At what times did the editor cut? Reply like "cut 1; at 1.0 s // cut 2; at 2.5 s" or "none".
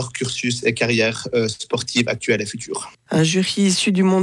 cut 1; at 3.1 s

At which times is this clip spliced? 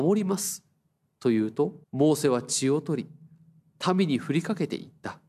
cut 1; at 1.8 s

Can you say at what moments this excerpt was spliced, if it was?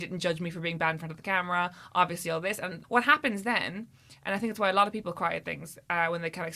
cut 1; at 2.8 s

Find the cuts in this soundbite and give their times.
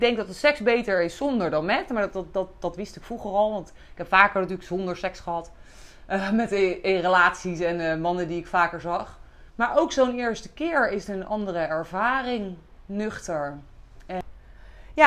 cut 1; at 9.5 s

